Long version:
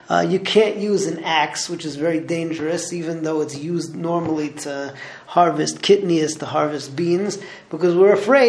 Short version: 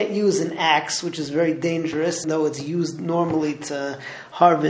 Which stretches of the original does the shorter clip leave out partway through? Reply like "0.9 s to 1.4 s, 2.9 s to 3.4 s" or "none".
2.9 s to 3.2 s

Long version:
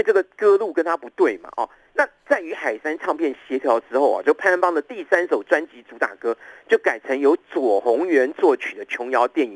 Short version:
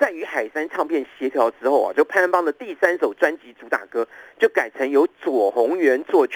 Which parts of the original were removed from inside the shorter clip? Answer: none

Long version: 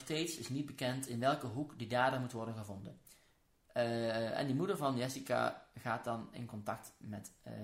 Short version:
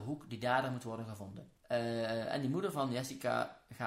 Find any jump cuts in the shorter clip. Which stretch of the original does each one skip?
3.1 s to 3.6 s

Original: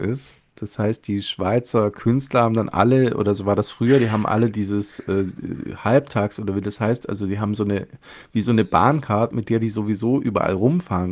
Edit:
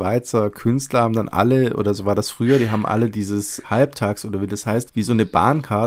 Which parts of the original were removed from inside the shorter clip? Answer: 5.0 s to 5.8 s, 7.0 s to 8.2 s

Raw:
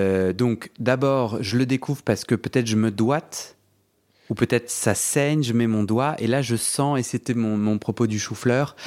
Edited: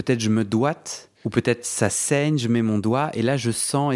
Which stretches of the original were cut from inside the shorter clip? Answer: 3.6 s to 4.2 s

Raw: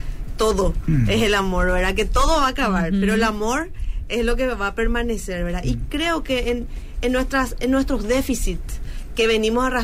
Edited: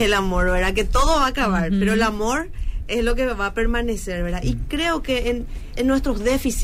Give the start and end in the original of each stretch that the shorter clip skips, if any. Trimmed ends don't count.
6.9 s to 7.6 s

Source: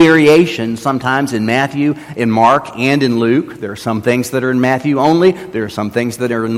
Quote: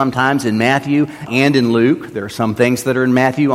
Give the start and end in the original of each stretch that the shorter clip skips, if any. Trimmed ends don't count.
2.1 s to 2.7 s

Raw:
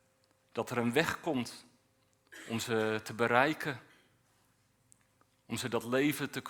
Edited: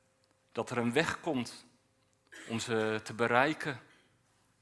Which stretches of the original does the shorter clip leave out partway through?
none

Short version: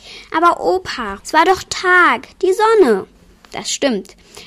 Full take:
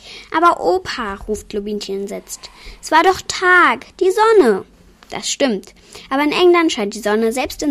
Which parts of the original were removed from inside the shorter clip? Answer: 1.2 s to 2.8 s

